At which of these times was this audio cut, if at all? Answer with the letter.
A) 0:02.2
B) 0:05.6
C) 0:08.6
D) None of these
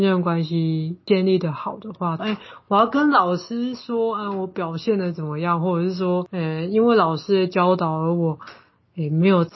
A